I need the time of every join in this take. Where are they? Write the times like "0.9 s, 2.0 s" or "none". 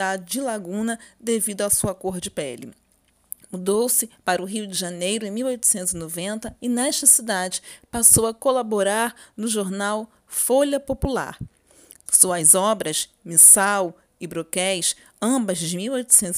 12.1 s